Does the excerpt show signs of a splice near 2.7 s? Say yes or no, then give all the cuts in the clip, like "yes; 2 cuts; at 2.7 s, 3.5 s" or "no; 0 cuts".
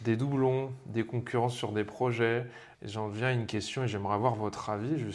yes; 1 cut; at 2.7 s